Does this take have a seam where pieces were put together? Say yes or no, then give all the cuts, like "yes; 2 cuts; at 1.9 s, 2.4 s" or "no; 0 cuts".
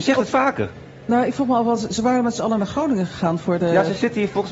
no; 0 cuts